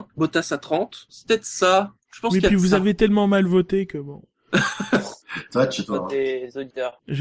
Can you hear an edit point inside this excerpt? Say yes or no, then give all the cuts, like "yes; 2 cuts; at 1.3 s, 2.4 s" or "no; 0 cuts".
yes; 2 cuts; at 1.1 s, 5.8 s